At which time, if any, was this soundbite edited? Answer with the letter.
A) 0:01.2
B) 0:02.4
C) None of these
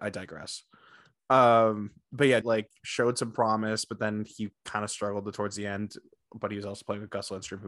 B